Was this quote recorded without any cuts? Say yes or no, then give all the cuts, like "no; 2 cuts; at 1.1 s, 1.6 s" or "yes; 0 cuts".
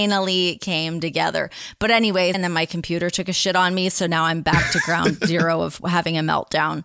no; 1 cut; at 2.3 s